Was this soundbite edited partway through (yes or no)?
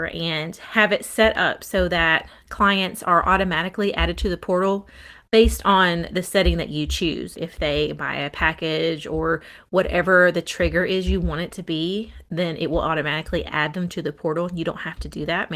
no